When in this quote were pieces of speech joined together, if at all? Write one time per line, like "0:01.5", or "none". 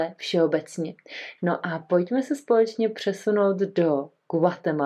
0:01.4